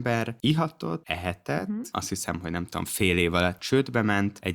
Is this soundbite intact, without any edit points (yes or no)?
no